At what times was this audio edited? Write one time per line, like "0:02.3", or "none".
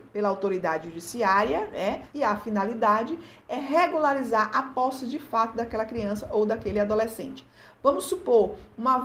0:02.1